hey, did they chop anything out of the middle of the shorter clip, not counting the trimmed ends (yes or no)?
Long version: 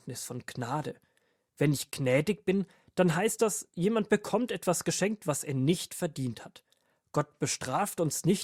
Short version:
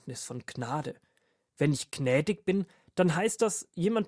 no